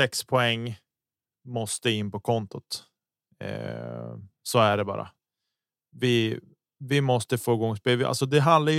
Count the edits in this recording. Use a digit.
0